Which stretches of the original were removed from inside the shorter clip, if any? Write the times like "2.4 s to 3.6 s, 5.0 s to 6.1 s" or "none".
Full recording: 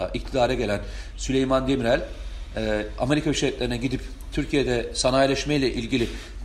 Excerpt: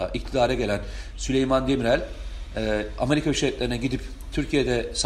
none